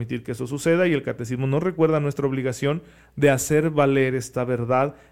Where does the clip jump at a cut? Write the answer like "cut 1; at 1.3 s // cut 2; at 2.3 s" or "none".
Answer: none